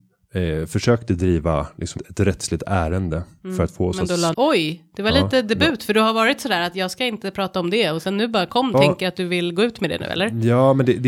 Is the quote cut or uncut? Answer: cut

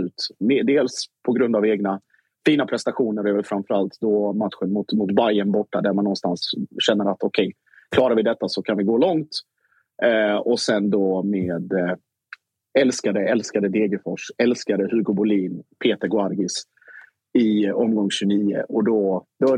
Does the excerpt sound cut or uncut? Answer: uncut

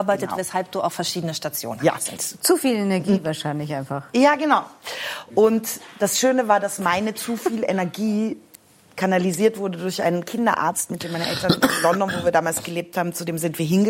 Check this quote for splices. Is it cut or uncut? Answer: cut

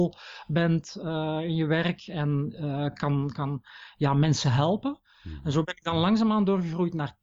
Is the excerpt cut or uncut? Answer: uncut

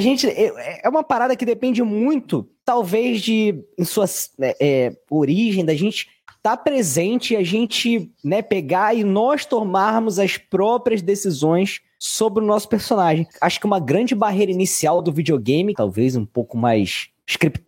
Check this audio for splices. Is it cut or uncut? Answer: cut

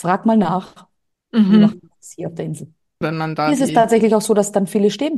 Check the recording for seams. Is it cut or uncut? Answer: cut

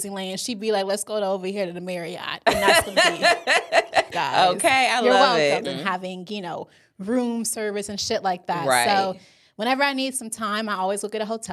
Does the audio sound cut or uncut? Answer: cut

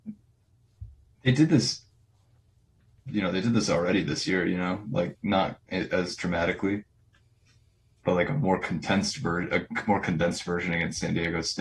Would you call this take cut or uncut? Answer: uncut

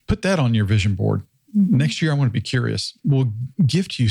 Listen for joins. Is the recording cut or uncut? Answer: uncut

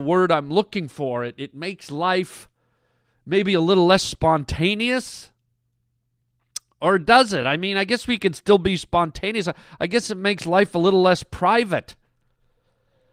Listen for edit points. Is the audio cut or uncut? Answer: uncut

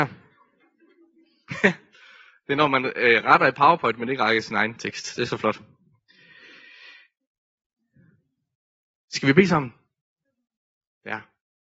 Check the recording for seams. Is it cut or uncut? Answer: uncut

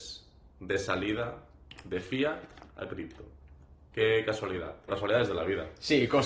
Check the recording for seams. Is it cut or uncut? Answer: cut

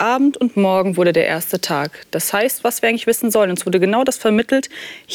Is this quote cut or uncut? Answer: cut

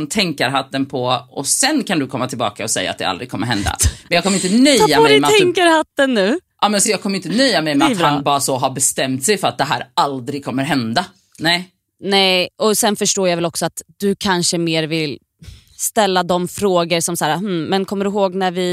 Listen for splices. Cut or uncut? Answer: uncut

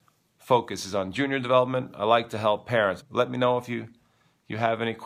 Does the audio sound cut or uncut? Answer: cut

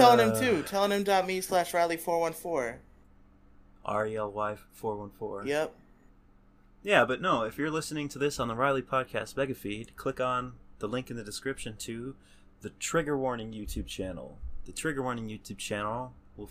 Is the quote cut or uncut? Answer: uncut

